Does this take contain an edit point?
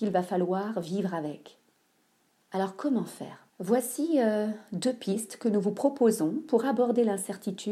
yes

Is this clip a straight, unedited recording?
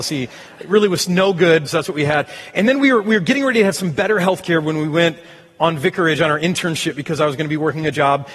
no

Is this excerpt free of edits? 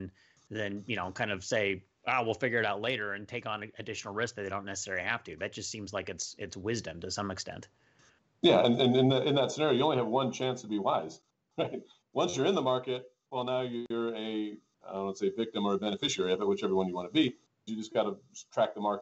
no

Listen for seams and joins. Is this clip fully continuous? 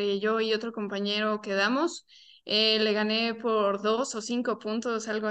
yes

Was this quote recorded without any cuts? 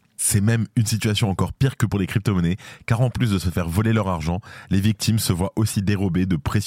yes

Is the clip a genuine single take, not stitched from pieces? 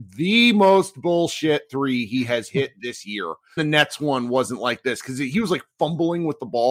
no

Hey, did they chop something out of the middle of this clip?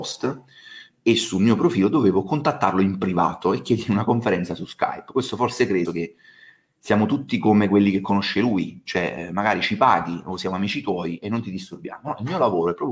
yes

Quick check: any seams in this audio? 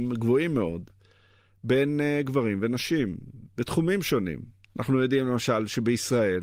yes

